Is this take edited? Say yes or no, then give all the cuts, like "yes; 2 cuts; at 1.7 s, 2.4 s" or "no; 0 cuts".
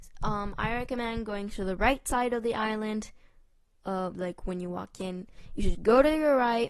yes; 2 cuts; at 4.1 s, 5.7 s